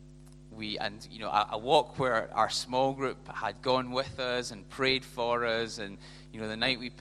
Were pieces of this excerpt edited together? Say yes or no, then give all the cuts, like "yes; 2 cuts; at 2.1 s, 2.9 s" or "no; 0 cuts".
no; 0 cuts